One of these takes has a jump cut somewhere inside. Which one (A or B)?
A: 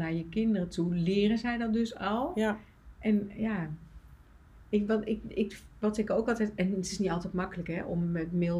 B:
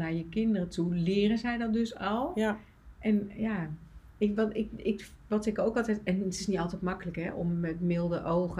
B